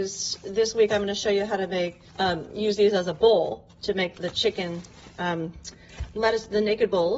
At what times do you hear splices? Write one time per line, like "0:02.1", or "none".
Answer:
0:02.1
0:04.2